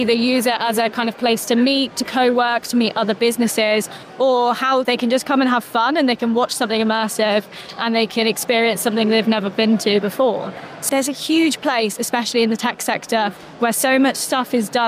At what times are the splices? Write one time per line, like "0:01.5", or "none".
0:04.9
0:10.9